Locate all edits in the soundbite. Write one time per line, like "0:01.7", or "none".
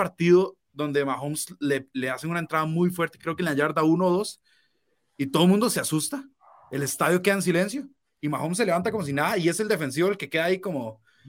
none